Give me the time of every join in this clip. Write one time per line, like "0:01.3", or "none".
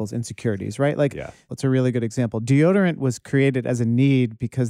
0:01.5